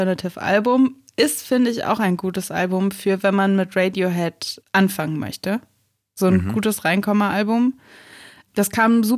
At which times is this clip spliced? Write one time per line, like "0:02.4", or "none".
none